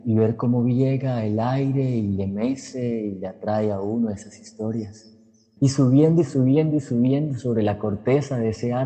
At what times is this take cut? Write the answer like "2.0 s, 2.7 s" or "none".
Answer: 5.6 s